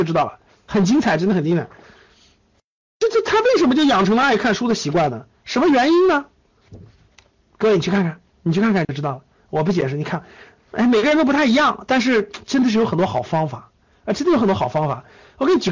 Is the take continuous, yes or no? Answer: yes